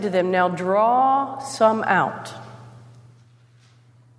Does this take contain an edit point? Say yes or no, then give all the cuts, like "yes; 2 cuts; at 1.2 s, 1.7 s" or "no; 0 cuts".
no; 0 cuts